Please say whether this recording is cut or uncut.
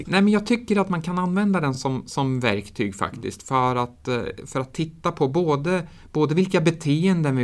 uncut